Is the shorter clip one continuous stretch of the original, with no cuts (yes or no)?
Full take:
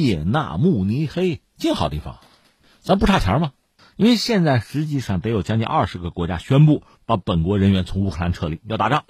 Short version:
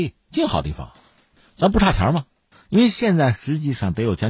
yes